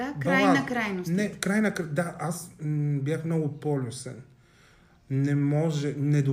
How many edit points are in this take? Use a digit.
0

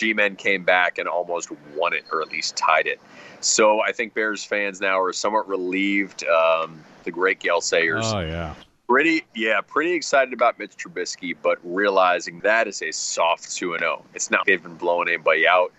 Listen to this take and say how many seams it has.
3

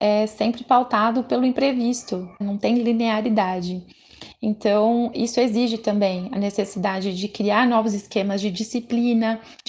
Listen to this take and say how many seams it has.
2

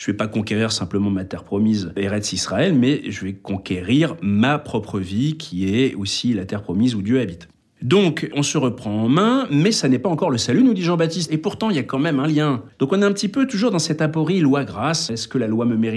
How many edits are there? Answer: 2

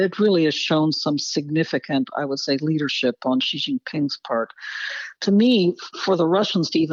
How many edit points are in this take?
1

